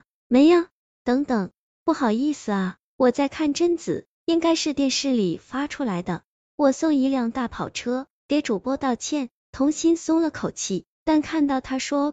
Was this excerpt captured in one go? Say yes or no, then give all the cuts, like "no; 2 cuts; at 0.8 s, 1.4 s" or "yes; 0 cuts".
no; 1 cut; at 9.4 s